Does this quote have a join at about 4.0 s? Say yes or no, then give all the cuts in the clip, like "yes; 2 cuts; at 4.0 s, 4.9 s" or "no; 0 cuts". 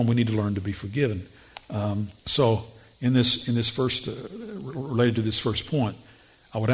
no; 1 cut; at 2.2 s